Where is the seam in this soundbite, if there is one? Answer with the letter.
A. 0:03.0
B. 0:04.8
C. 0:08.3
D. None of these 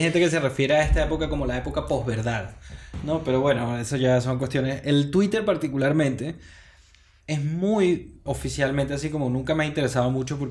C